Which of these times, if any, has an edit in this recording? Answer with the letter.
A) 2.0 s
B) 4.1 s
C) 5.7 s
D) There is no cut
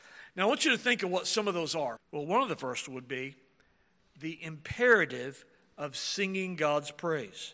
A